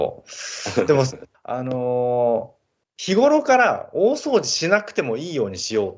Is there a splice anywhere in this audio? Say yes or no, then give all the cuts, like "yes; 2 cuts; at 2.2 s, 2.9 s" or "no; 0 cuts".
yes; 2 cuts; at 1.3 s, 2.8 s